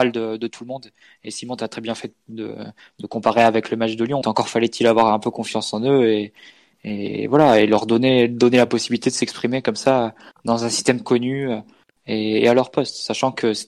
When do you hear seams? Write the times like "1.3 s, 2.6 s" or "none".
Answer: 4.2 s